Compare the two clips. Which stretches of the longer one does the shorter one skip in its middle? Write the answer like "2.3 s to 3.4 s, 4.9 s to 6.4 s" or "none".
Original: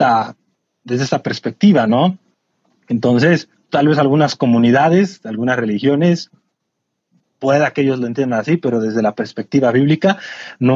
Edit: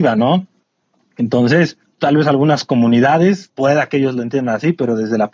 5.2 s to 7.3 s